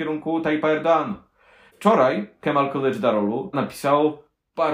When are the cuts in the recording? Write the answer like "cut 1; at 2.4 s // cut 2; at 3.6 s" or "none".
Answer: cut 1; at 1.7 s // cut 2; at 3.5 s